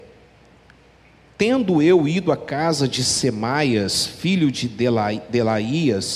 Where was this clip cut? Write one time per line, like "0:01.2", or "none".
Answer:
none